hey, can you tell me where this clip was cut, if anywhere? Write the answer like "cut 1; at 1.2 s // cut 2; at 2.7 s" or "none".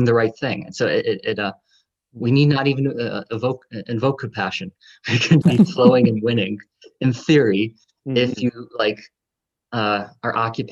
cut 1; at 2.0 s // cut 2; at 5.4 s